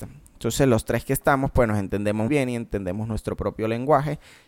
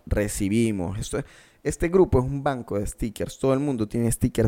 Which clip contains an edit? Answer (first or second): first